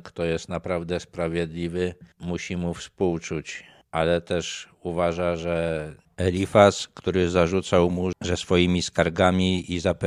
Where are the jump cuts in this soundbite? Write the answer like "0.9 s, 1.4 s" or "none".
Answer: none